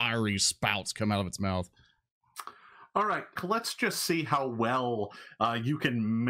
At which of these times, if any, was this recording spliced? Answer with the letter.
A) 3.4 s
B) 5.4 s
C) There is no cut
A